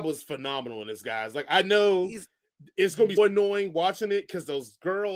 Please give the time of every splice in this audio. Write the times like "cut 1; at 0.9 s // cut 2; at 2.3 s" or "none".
cut 1; at 3.2 s